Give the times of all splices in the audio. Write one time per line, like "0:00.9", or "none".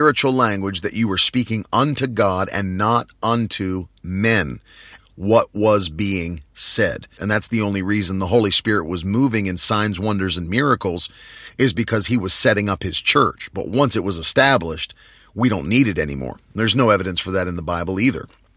0:05.0
0:07.2